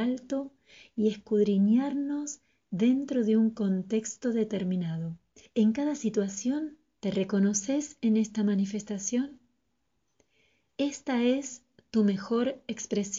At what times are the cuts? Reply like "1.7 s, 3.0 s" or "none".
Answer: 7.0 s

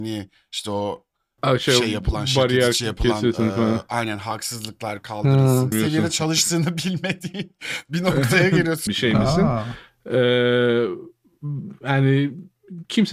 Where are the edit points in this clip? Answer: 5.7 s, 8.9 s

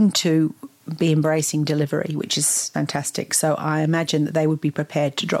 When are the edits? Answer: 2.7 s

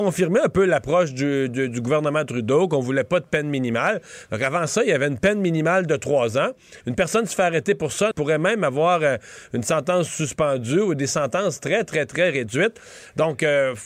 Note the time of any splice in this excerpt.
6.8 s, 8.1 s

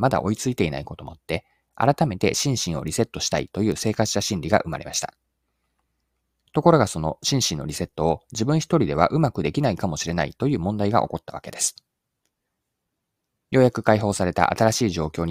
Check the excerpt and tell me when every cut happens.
13.4 s

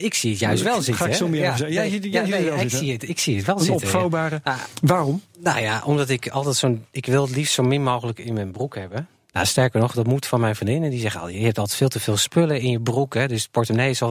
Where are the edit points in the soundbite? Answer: none

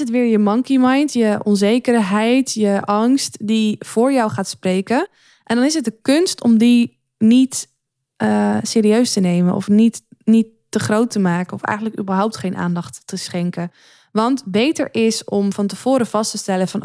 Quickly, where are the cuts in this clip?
none

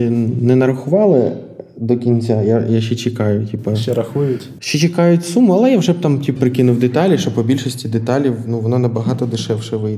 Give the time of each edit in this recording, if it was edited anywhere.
6.4 s

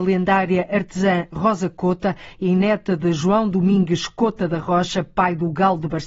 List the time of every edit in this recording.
none

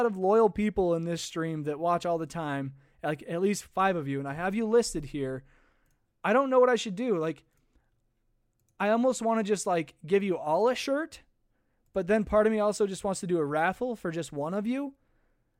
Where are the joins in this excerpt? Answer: none

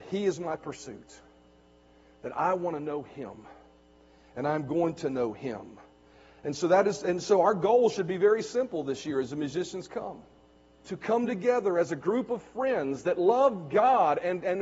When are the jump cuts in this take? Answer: 10.8 s

